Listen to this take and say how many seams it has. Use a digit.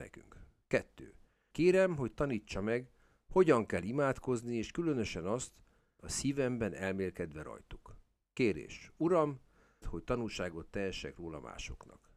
3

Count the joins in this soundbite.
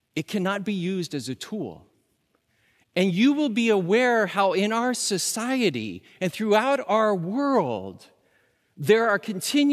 1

